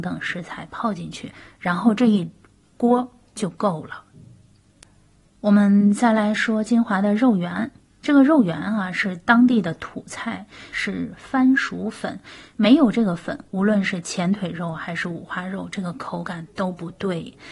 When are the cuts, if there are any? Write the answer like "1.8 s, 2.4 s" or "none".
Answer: 10.7 s